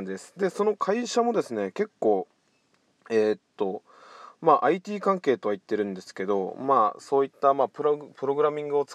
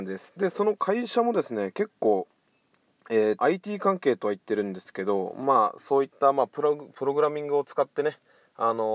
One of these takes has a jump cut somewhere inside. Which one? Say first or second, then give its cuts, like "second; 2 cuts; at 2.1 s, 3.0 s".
second; 1 cut; at 3.4 s